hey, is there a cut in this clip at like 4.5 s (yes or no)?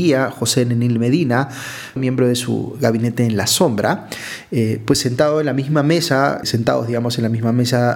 no